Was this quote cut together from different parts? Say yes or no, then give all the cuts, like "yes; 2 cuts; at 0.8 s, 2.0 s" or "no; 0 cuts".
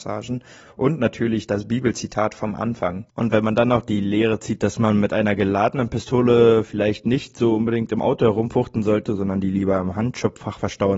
no; 0 cuts